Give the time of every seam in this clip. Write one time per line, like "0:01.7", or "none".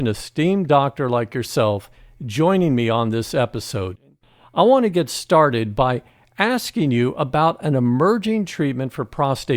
none